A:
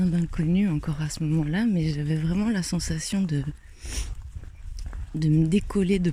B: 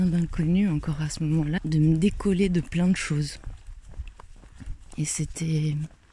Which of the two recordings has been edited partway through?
B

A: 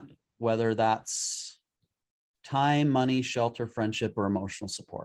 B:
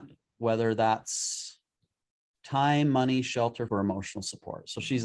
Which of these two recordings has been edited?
B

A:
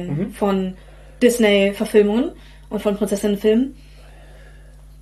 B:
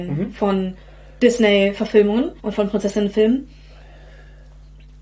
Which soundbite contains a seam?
B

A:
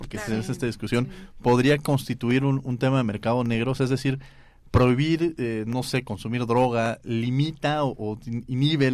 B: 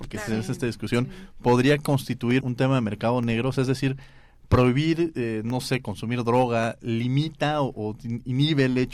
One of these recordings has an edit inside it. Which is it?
B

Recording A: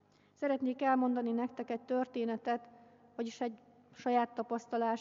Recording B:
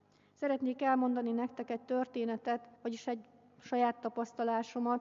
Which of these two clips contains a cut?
B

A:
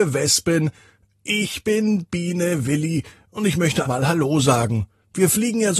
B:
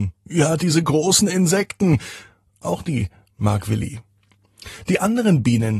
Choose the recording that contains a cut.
A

